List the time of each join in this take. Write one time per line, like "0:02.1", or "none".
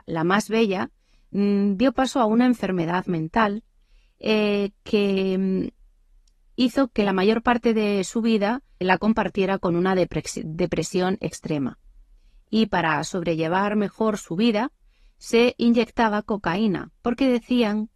0:08.8

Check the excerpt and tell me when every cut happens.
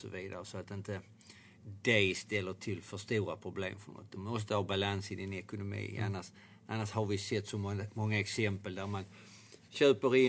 none

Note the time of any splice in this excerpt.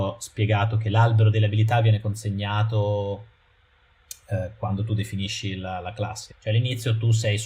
0:06.3

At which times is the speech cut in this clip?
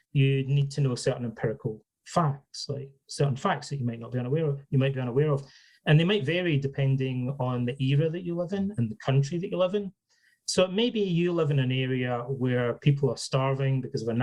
none

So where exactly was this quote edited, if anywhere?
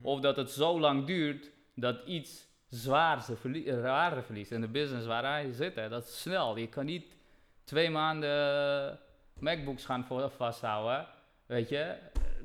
none

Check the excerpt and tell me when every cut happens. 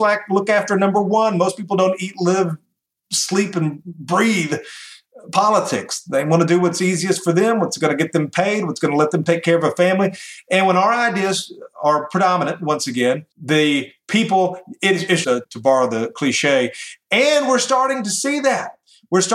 0:13.3
0:15.2

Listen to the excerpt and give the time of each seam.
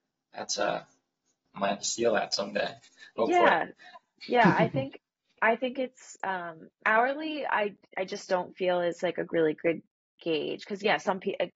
0:01.5

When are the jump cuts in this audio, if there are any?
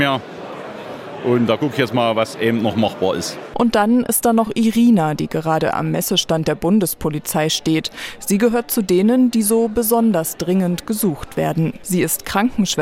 none

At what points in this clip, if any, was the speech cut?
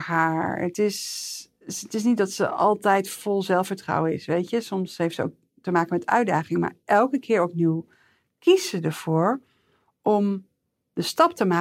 none

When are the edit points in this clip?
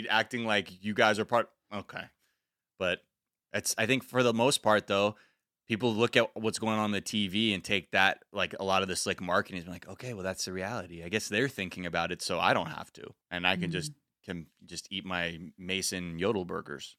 0:13.2

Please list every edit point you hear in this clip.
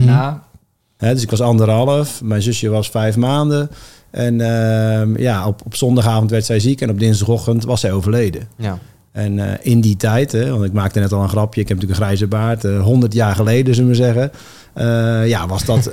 0:01.0

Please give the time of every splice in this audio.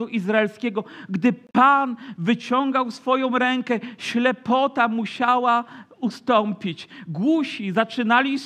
none

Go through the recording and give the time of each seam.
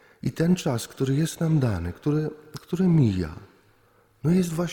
none

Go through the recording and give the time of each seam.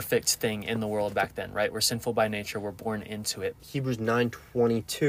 0:03.6

